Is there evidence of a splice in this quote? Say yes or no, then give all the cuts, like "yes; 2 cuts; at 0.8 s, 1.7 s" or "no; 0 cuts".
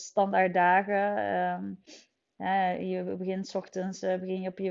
no; 0 cuts